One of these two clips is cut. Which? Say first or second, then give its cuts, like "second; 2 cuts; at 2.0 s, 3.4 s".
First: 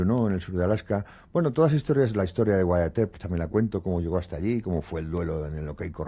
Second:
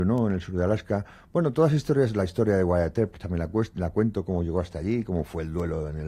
first; 1 cut; at 3.5 s